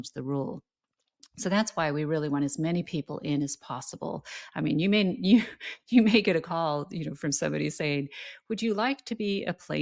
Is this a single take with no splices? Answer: yes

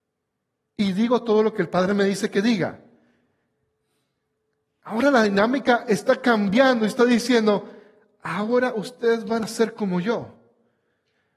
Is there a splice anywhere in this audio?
no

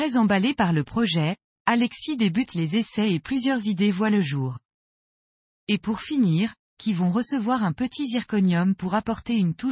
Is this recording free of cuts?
no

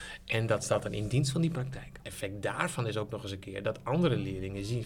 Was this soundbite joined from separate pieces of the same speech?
yes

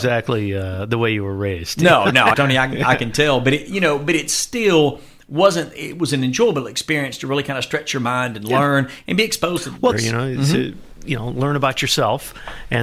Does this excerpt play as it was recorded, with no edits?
no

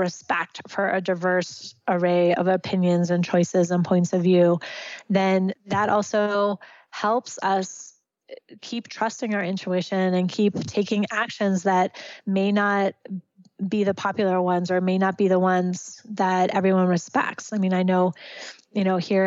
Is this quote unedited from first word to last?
yes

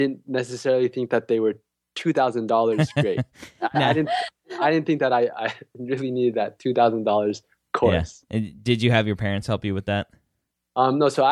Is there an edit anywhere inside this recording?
no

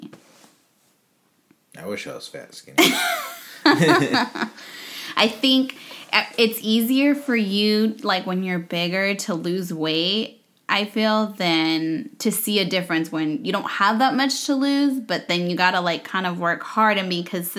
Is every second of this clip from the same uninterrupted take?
yes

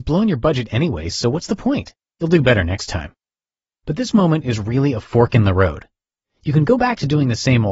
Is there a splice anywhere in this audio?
no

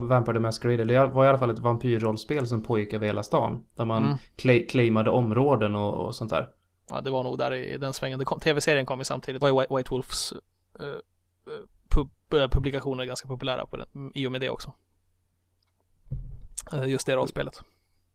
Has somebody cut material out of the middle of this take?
yes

